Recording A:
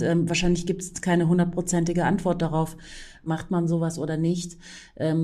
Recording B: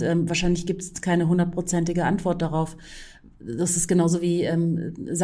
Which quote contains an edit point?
A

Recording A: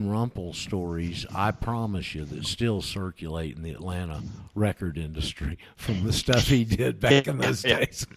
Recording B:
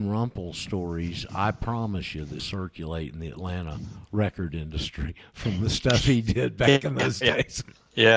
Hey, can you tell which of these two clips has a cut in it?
B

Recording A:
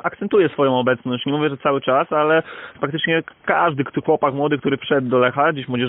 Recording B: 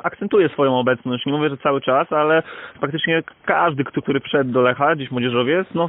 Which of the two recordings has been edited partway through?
B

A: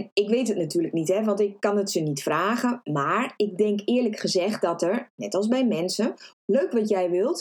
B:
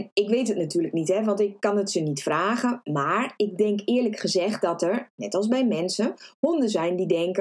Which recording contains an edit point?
A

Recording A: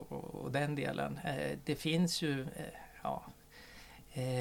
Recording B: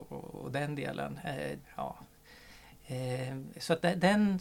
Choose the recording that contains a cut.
B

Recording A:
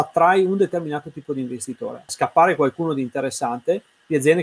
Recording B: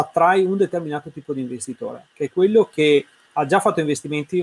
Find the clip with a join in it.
A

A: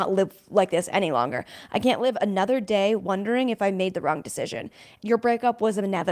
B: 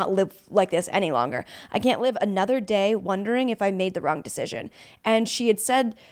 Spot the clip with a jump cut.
A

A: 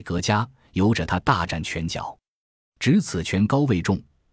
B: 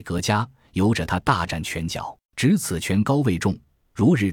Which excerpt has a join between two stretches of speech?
B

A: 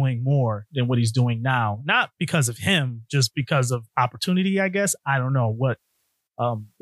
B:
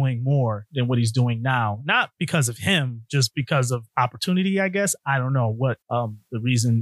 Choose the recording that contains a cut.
B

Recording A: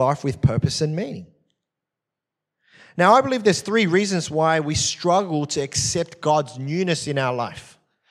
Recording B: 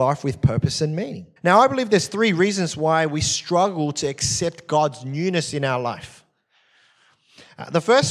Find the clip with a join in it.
B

